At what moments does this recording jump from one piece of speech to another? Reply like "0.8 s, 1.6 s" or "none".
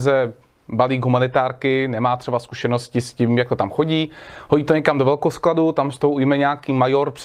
none